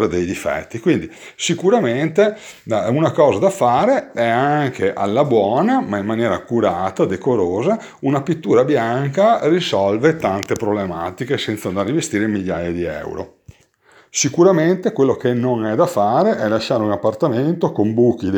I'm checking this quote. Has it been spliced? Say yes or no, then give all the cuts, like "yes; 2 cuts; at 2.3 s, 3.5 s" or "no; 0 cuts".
no; 0 cuts